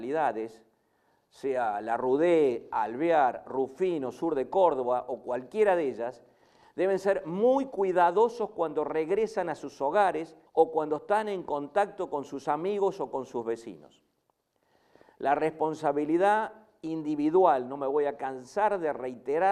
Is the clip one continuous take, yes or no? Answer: no